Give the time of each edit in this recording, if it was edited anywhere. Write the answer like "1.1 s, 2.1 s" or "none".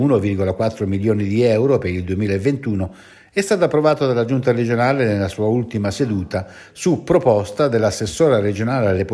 none